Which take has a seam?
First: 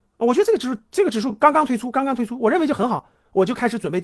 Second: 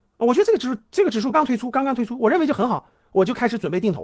second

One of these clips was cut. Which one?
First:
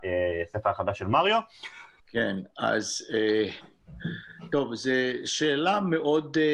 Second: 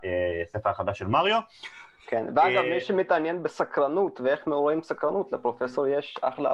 first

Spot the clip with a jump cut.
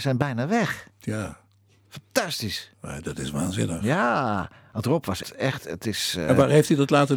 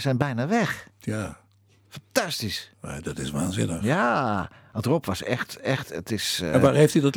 first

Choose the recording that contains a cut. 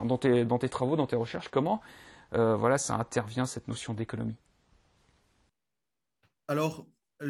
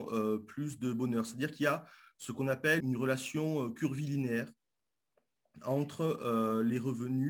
second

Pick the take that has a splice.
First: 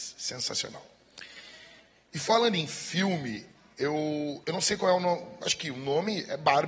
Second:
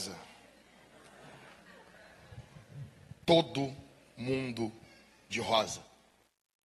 first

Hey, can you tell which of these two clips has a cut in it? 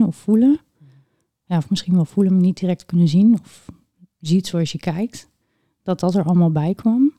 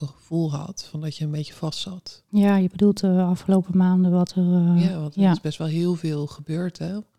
second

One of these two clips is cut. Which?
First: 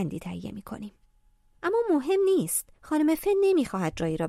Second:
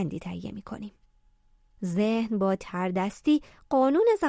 first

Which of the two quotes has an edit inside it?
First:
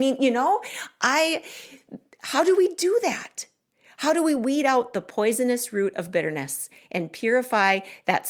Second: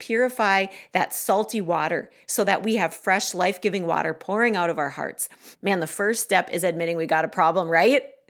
second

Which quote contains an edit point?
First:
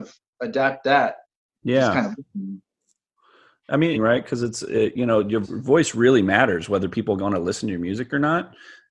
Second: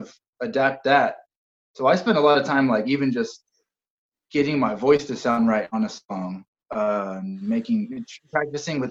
first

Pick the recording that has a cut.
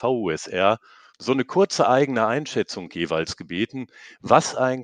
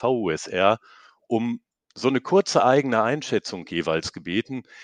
first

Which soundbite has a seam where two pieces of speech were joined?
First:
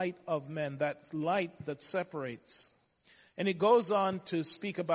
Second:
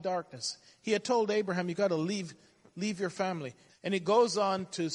second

